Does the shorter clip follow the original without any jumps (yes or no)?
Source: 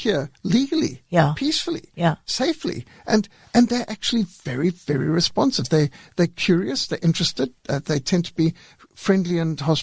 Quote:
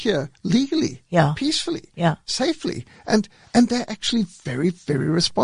yes